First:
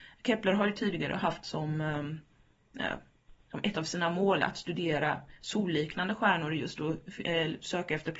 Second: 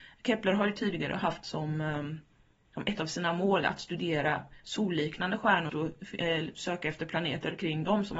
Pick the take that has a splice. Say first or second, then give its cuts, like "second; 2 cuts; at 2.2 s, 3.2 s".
second; 2 cuts; at 2.7 s, 5.7 s